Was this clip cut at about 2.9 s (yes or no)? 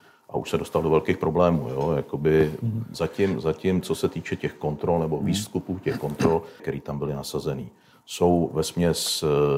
yes